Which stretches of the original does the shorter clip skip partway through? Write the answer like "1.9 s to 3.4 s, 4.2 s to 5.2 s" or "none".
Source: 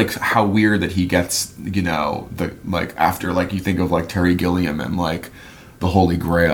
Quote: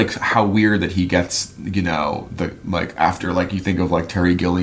none